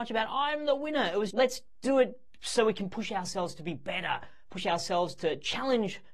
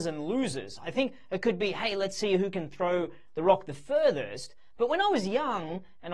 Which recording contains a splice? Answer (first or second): first